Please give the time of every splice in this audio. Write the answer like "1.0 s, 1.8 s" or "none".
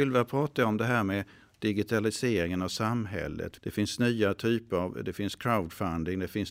3.6 s